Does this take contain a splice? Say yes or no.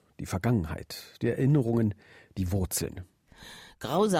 no